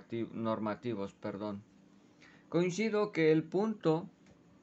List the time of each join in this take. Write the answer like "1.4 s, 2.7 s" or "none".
none